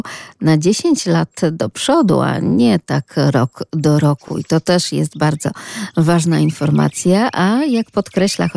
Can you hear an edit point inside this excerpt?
no; 0 cuts

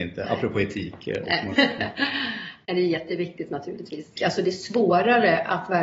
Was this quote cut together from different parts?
yes; 2 cuts; at 1.5 s, 4.1 s

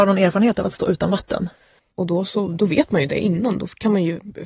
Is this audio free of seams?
no; 1 cut; at 1.8 s

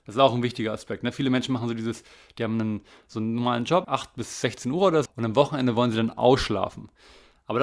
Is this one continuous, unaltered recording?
no; 2 cuts; at 3.8 s, 5.1 s

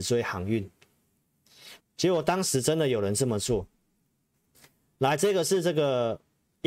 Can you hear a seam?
yes; 1 cut; at 1.8 s

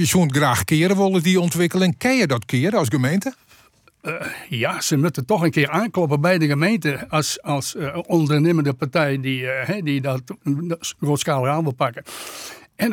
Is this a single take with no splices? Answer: yes; 0 cuts

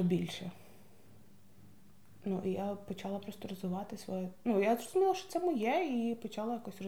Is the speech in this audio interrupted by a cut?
no; 0 cuts

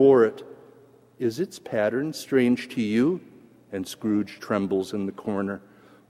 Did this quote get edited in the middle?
yes; 1 cut; at 4.4 s

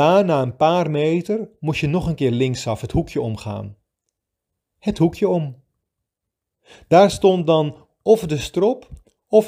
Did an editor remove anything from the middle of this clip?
no; 0 cuts

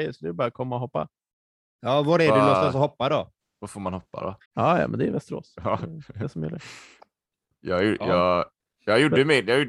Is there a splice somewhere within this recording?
yes; 1 cut; at 4.5 s

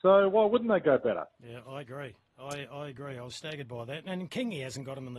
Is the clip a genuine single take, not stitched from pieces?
yes; 0 cuts

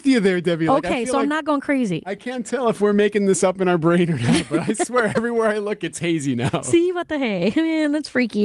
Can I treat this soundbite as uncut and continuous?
yes; 0 cuts

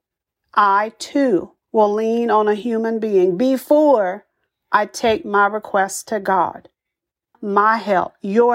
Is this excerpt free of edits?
no; 2 cuts; at 1.6 s, 7.3 s

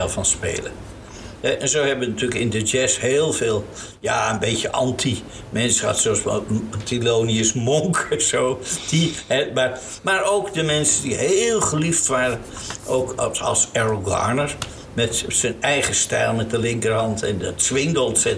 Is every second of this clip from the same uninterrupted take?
yes; 0 cuts

